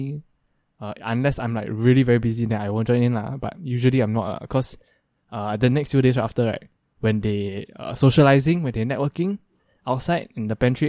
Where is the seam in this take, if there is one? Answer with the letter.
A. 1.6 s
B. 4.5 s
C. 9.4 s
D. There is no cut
D